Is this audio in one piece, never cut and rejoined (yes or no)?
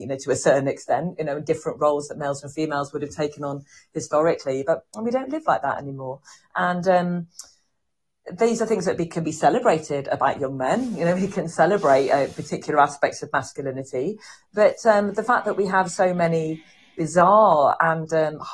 yes